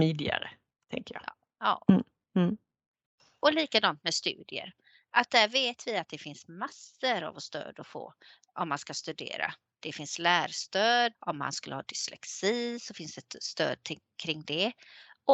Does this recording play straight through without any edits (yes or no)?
no